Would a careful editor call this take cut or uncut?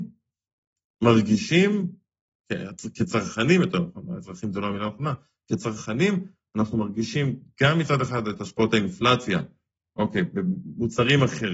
uncut